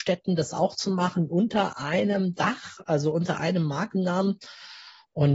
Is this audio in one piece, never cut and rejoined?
yes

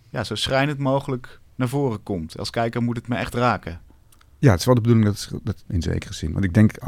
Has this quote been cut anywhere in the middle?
yes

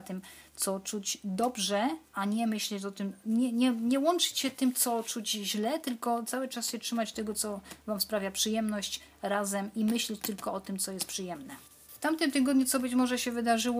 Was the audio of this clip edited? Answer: no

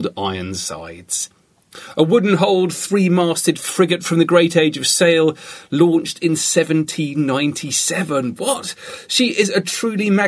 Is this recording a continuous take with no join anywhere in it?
yes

